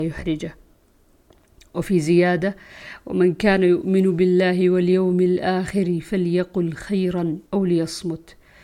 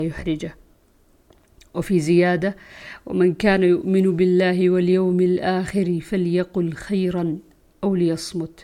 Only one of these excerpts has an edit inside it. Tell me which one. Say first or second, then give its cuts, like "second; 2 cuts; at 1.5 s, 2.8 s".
first; 1 cut; at 7.5 s